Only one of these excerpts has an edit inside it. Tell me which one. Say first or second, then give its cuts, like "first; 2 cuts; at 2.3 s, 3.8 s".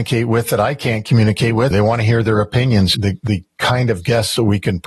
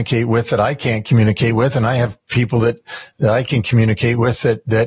first; 2 cuts; at 1.7 s, 2.9 s